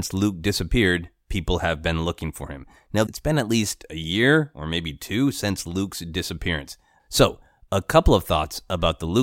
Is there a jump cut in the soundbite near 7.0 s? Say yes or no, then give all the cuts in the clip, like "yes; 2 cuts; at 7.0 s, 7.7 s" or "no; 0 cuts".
yes; 2 cuts; at 3.1 s, 7.0 s